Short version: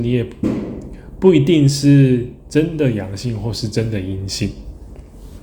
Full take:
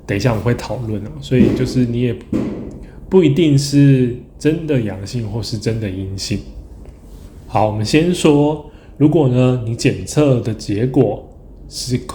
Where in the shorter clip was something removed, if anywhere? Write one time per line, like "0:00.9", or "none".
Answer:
none